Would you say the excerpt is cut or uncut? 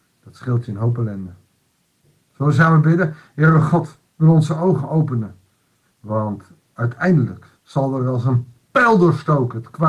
cut